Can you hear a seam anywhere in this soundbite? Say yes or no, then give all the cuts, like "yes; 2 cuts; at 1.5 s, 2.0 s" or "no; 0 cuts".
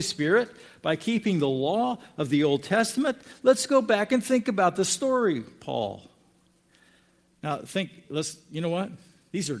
yes; 1 cut; at 7.3 s